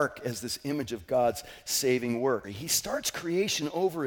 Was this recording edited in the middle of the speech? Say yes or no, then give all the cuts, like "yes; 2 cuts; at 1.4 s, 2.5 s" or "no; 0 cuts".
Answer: yes; 1 cut; at 2.4 s